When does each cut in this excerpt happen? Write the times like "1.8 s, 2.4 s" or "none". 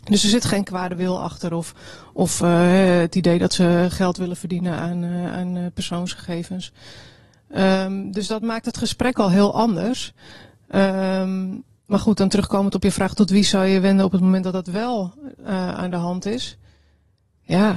none